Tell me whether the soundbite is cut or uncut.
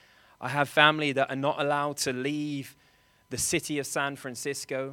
uncut